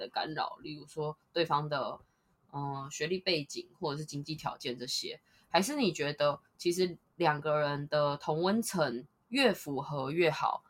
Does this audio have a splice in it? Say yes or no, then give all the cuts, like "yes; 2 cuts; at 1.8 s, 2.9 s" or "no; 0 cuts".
no; 0 cuts